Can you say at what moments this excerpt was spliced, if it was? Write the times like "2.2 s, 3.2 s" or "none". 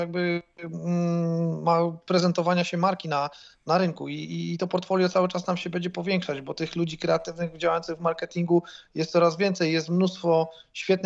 none